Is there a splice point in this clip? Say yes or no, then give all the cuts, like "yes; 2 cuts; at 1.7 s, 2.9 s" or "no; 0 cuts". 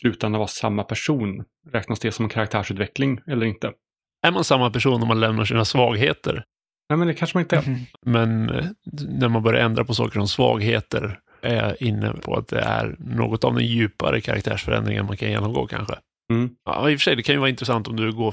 yes; 2 cuts; at 7.9 s, 16.6 s